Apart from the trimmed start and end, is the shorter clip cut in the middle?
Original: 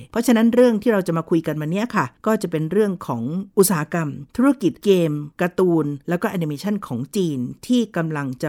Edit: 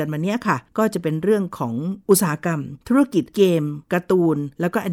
no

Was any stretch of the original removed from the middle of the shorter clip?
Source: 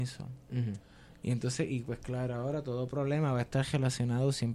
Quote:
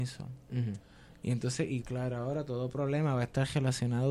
yes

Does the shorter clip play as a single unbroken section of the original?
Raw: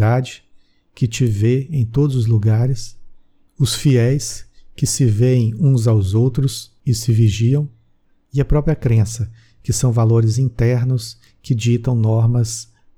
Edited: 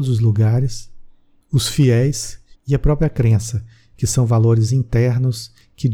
no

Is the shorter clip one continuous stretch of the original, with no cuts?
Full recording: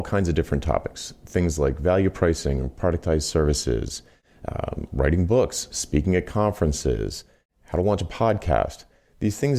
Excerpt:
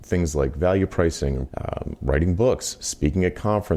no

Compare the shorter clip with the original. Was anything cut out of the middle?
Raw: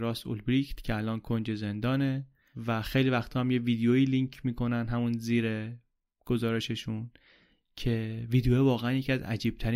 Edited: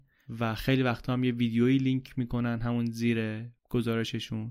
yes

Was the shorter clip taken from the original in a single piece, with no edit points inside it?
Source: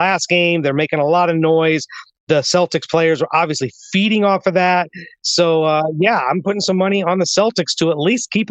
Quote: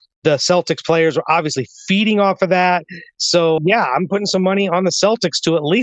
no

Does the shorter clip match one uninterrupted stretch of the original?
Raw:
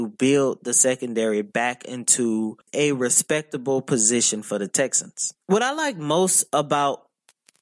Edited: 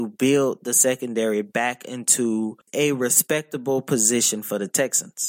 yes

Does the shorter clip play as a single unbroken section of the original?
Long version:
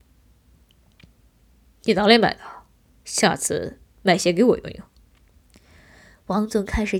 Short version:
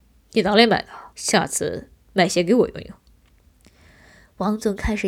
no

